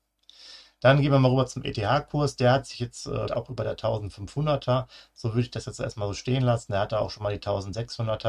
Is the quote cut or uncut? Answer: cut